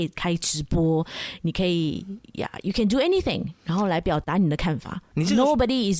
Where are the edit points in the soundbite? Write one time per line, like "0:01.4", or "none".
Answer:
none